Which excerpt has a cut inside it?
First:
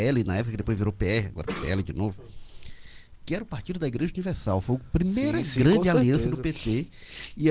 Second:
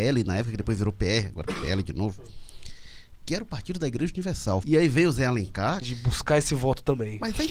second; 2 cuts; at 4.6 s, 5.8 s

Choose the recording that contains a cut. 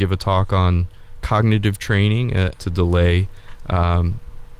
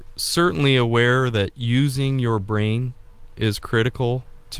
first; 1 cut; at 2.6 s

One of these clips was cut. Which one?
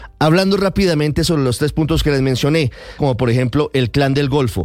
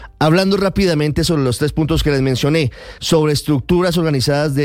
first; 1 cut; at 3.0 s

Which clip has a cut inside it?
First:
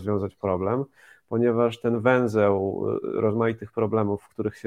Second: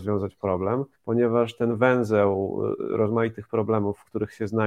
second; 1 cut; at 0.9 s

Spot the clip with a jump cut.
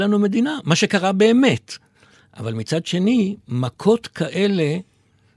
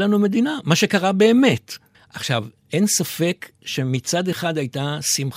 second; 1 cut; at 1.9 s

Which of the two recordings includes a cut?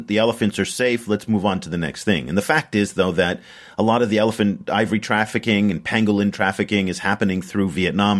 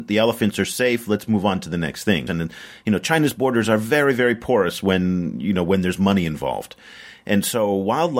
second; 1 cut; at 2.3 s

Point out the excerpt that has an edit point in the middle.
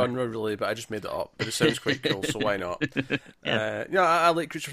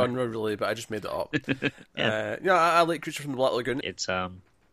second; 2 cuts; at 1.3 s, 3.8 s

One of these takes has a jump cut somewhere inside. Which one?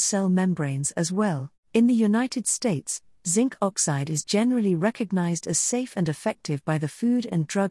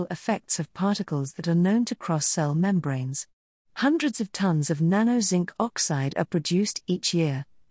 first; 1 cut; at 1.6 s

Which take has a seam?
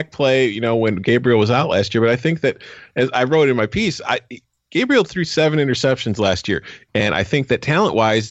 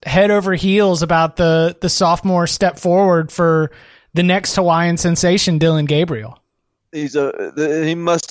first; 1 cut; at 6.9 s

